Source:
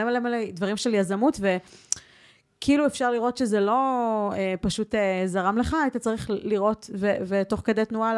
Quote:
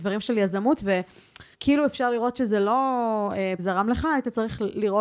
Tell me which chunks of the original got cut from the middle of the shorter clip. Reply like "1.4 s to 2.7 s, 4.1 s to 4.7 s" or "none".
2.1 s to 2.5 s, 4.6 s to 5.3 s